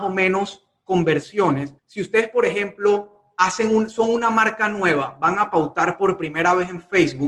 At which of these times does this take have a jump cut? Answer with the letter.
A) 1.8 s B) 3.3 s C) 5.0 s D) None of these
A